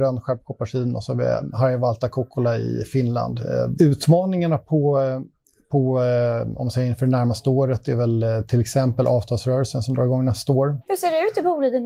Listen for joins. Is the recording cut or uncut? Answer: cut